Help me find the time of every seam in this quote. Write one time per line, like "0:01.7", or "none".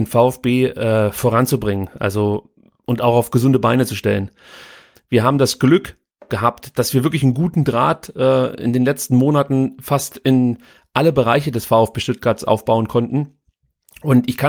0:05.0